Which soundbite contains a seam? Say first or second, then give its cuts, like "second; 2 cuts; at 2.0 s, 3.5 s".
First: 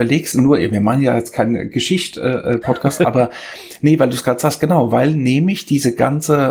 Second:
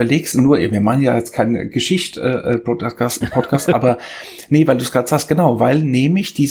first; 1 cut; at 2.6 s